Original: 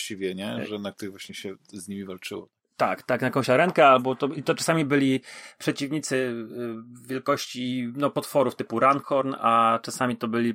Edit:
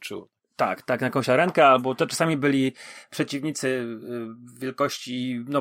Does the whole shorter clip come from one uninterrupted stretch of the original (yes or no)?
no